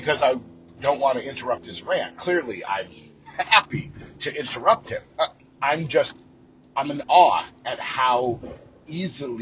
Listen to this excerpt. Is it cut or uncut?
cut